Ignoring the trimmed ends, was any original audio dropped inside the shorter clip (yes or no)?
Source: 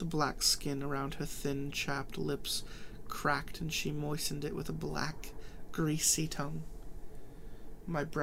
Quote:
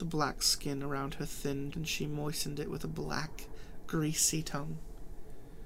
yes